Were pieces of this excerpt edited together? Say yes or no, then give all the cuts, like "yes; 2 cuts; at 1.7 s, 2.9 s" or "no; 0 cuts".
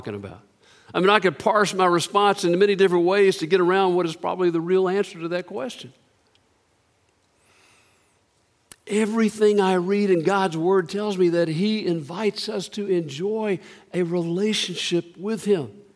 no; 0 cuts